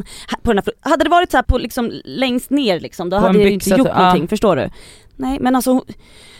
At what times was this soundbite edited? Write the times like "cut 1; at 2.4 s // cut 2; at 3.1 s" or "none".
cut 1; at 1.4 s